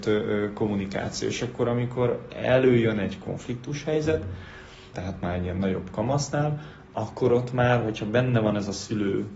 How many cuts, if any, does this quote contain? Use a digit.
1